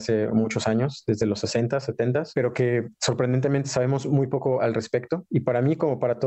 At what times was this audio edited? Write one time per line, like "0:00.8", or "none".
none

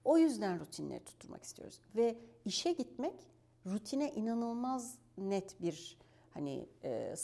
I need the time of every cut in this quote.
none

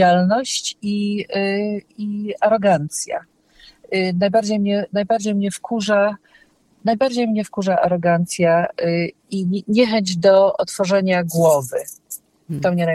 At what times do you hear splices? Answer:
none

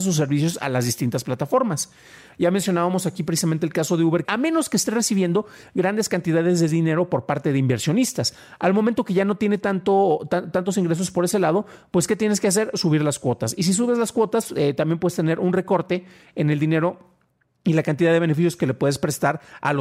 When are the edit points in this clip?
0:04.2

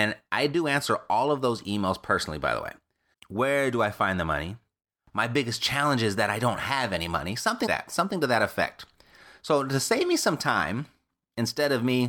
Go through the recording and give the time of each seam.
0:03.1
0:07.7

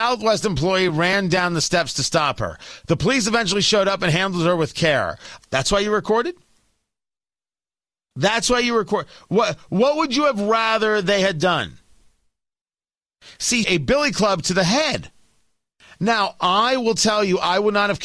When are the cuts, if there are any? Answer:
0:05.4
0:13.6

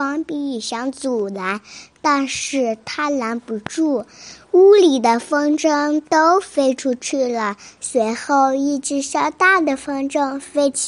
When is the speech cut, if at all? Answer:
0:07.8

